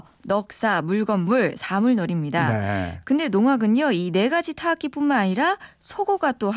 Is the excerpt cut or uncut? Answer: uncut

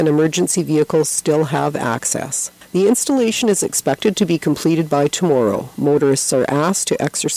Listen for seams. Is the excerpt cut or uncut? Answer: uncut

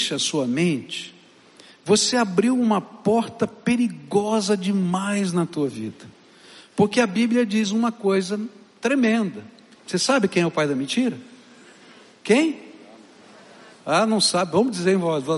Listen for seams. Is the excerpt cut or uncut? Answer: cut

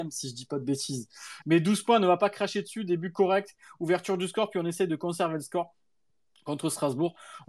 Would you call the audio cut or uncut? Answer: cut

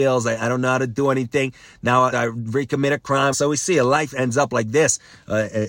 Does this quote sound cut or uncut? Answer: cut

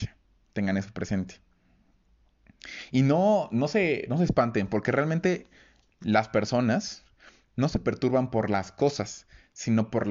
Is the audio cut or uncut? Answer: uncut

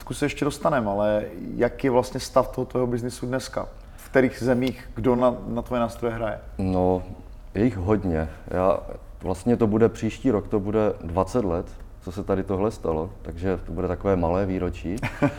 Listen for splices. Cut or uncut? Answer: uncut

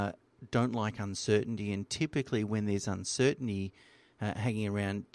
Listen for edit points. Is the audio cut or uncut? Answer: uncut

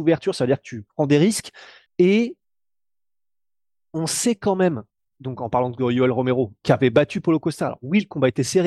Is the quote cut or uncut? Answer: cut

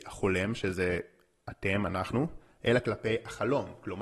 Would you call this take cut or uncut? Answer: uncut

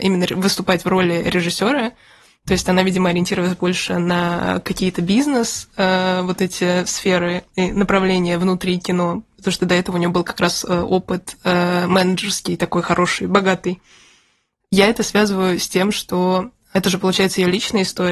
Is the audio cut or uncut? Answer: uncut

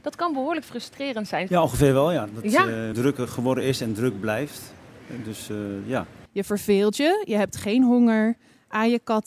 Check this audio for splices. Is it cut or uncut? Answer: cut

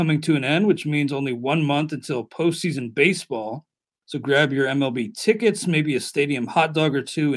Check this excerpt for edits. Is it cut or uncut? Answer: cut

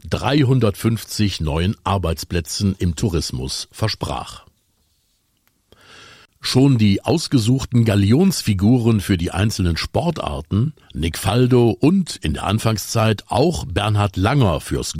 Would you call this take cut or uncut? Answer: cut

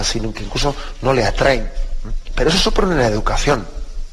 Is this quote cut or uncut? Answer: uncut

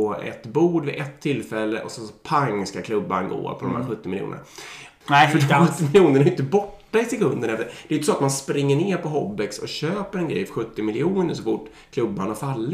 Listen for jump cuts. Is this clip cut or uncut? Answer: cut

